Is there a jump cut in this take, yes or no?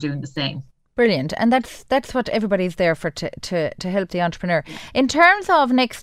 no